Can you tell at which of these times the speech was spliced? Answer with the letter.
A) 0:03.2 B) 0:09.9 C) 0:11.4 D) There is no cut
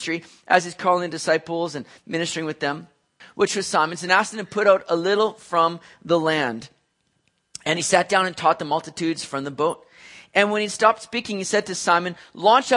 A